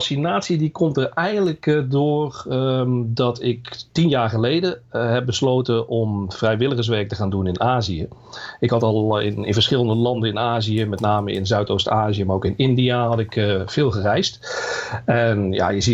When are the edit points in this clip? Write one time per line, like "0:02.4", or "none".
none